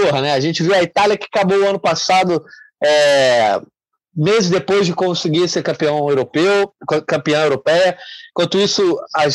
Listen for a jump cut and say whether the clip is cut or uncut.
cut